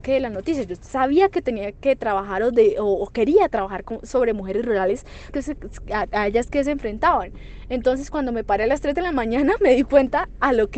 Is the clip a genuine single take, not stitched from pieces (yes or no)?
no